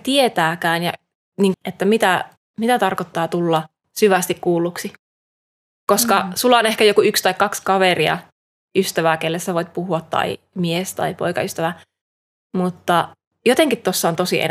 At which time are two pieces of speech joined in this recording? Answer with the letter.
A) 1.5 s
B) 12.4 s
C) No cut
A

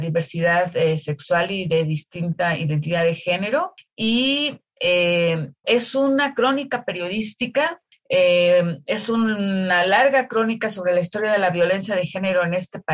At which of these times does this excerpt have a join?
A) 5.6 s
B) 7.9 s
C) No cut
A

